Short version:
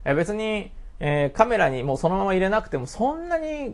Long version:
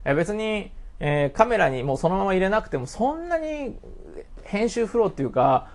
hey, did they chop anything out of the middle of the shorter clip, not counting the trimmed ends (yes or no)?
no